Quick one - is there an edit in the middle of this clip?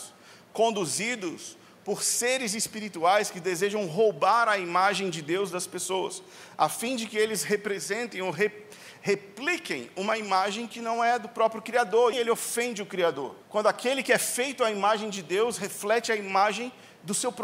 yes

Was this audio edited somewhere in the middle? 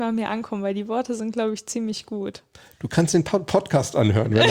no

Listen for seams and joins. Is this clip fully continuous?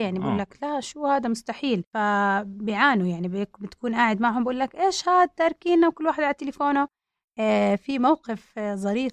no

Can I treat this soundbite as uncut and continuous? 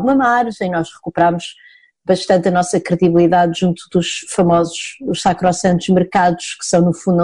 yes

